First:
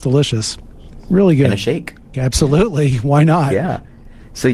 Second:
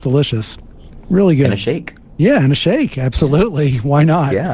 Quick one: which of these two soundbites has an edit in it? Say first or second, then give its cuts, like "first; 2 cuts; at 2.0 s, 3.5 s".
first; 1 cut; at 2.1 s